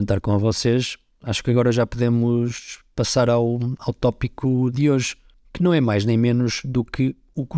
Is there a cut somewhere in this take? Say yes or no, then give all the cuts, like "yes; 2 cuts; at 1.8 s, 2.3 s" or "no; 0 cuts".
no; 0 cuts